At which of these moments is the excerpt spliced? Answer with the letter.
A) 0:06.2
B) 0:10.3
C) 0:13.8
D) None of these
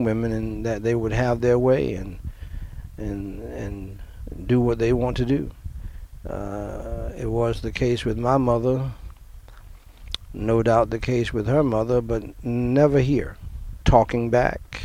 C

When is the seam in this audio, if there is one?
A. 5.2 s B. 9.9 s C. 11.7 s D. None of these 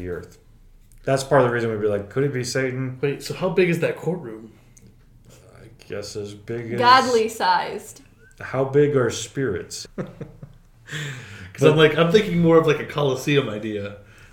B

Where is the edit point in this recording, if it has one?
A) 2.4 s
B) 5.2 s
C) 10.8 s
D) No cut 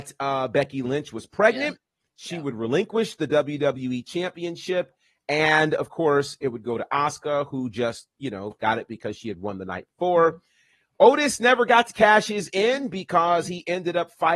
D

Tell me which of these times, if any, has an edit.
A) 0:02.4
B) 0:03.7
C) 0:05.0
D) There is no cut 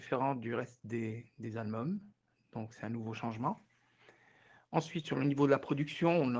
D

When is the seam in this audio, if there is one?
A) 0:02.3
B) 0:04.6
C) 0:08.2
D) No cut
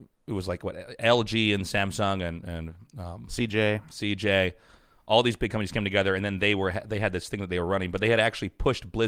D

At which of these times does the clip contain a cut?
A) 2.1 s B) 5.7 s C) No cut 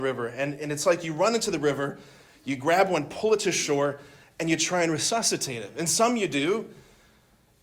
C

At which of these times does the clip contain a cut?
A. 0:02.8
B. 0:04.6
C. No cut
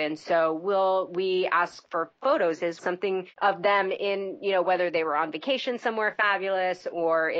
A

